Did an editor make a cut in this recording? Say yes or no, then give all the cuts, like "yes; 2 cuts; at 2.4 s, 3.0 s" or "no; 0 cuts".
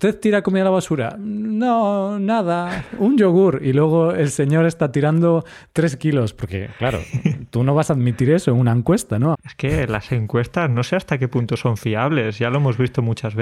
yes; 1 cut; at 9.3 s